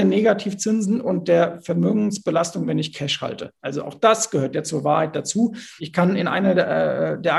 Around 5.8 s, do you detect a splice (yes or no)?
yes